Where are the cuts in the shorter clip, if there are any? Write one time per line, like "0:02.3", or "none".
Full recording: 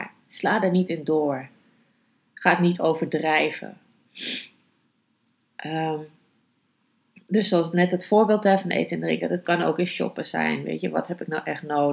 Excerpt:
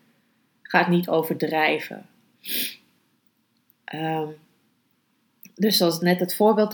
none